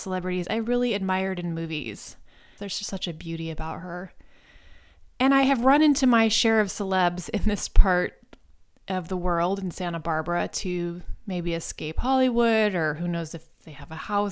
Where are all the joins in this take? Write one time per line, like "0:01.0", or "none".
0:02.6